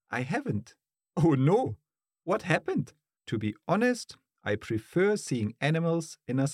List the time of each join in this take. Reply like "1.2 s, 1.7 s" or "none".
0.9 s, 3.2 s